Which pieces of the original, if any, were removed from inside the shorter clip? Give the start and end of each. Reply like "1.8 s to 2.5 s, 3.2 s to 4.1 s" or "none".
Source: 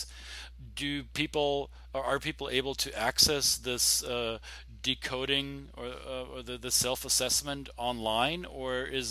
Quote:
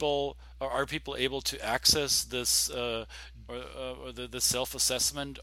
4.8 s to 5.8 s